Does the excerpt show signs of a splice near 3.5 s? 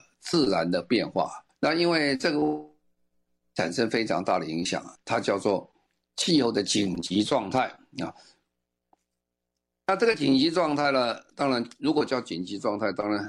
no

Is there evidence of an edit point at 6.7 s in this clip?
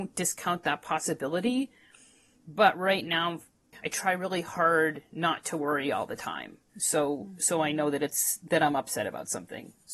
yes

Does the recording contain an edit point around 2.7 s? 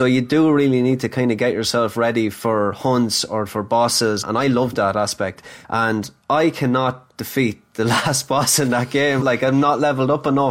no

